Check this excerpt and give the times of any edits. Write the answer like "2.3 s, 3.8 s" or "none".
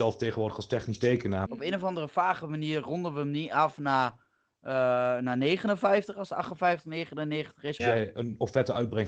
1.5 s, 7.8 s

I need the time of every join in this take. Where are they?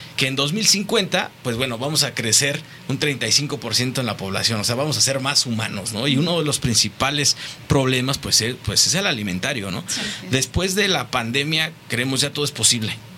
none

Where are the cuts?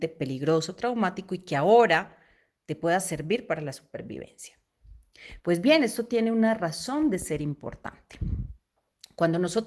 5.4 s

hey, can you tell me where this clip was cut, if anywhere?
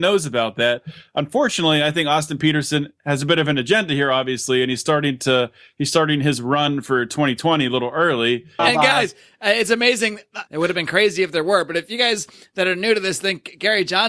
8.6 s, 10.5 s

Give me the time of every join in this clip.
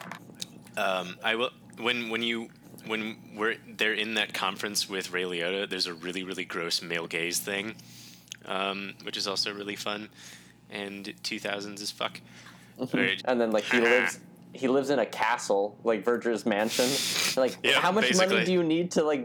13.2 s

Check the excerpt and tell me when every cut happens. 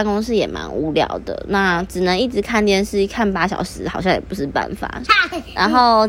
5.1 s

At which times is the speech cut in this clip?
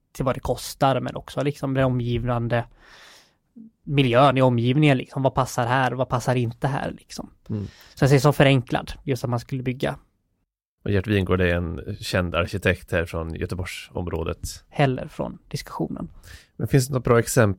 14.7 s

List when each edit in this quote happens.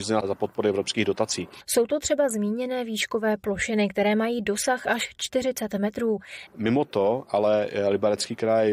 6.5 s

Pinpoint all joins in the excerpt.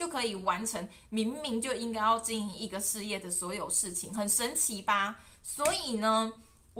none

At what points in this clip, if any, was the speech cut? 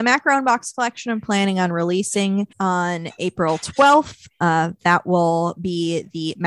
2.5 s

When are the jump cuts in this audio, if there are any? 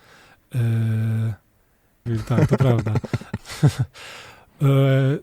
2.1 s, 3.4 s

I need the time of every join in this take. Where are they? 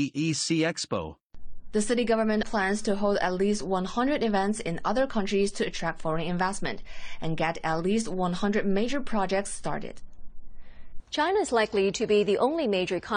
2.4 s, 11.0 s

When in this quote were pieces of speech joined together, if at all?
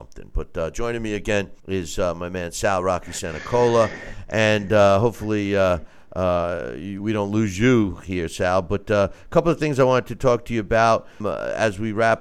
1.6 s, 11.2 s

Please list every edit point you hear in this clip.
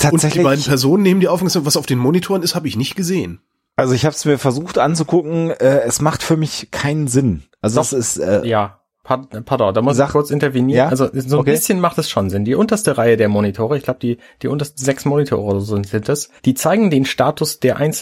16.4 s

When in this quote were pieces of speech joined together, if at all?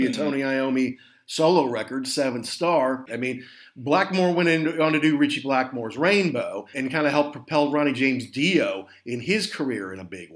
3.1 s, 6.7 s

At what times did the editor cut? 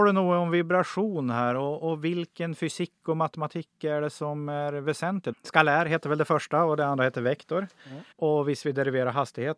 5.3 s, 8.1 s

